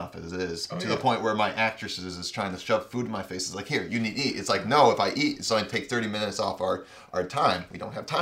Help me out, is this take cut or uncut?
uncut